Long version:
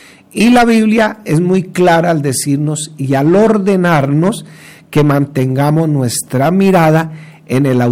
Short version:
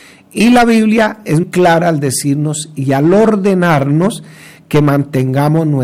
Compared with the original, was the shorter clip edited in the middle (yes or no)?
yes